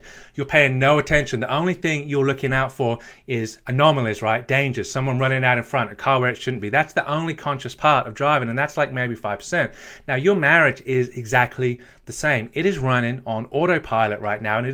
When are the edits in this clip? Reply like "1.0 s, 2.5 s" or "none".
none